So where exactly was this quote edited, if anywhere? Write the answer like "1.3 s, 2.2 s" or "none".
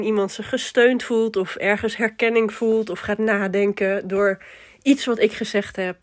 none